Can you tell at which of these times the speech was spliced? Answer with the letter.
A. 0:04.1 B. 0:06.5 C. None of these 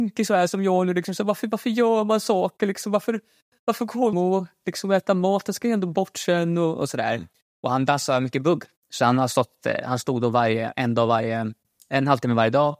A